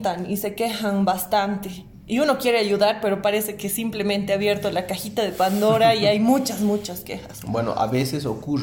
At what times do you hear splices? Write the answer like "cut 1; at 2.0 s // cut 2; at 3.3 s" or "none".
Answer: none